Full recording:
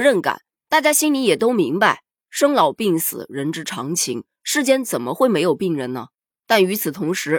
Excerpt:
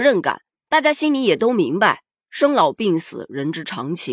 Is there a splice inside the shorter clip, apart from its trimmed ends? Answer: no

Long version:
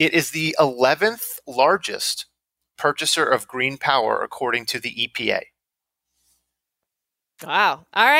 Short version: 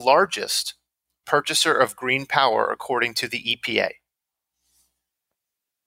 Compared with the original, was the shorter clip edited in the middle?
no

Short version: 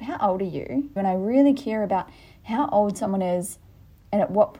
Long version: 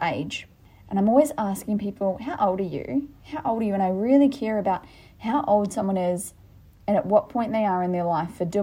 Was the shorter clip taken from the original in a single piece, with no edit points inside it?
no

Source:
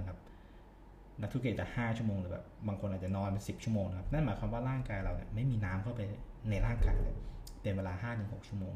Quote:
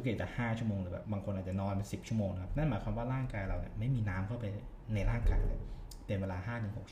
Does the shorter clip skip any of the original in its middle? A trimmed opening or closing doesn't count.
yes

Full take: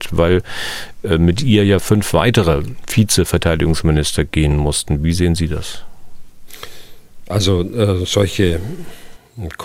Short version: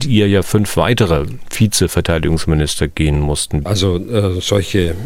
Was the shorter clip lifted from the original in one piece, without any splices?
no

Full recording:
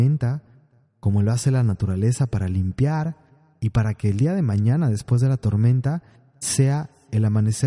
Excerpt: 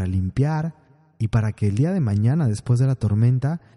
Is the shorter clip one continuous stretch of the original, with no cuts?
yes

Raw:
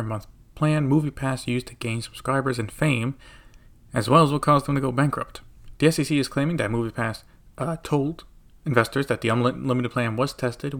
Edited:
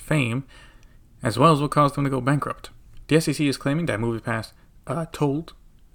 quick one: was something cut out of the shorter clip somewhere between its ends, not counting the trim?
no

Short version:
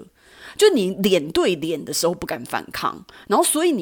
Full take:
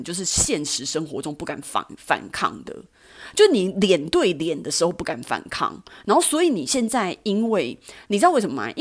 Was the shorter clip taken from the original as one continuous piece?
yes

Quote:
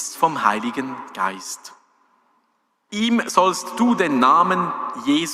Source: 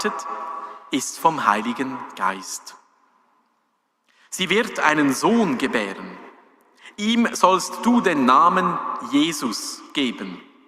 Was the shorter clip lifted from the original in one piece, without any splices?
no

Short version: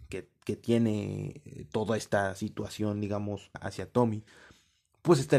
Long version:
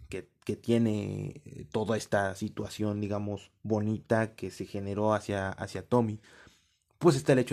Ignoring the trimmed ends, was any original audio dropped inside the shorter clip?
yes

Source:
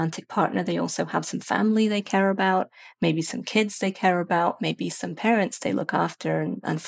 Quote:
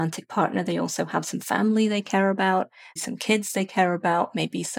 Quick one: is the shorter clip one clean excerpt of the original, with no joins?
no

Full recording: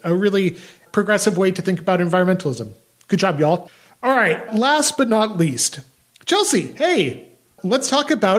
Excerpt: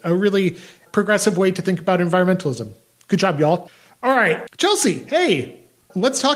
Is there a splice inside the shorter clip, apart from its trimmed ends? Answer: yes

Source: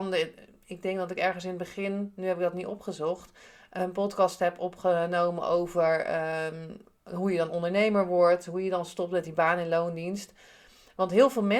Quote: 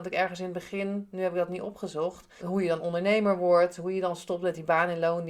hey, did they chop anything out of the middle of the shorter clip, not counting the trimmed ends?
yes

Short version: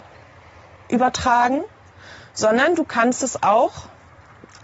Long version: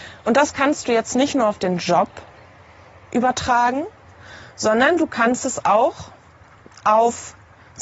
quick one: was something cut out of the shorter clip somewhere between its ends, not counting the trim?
no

